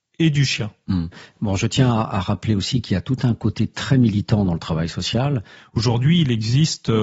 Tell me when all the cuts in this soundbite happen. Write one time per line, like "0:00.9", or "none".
0:05.6

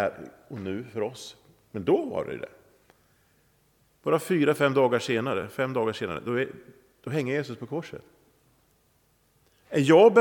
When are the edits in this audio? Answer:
0:03.9

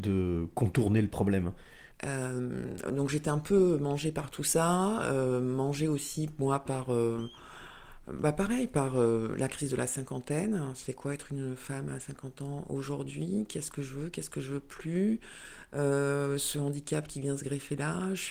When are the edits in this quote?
0:01.9

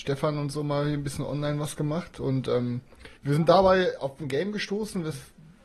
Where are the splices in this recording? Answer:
0:03.2

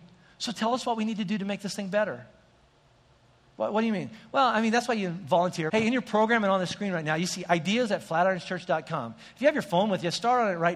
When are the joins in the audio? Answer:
0:05.7

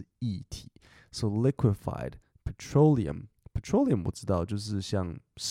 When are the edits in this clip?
none

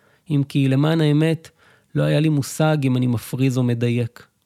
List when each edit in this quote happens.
none

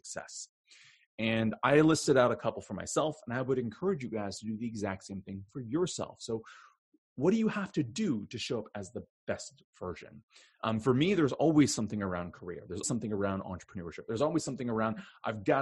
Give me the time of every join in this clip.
0:12.8

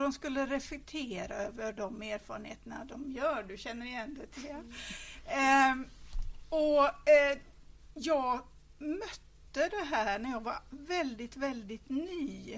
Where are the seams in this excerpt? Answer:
none

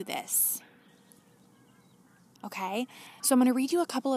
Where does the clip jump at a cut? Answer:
0:03.2

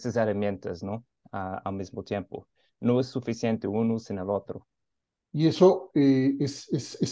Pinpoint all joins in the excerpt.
0:05.2

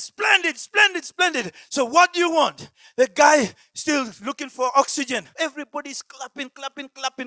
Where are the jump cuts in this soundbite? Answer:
0:02.8
0:05.4

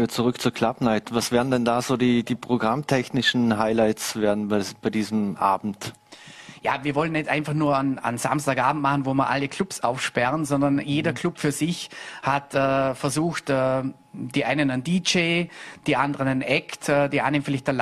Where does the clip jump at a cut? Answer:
none

